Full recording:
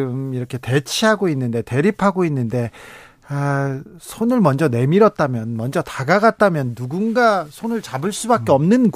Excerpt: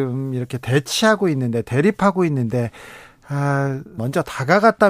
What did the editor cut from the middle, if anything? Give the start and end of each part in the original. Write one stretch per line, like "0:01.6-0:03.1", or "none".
0:04.0-0:05.6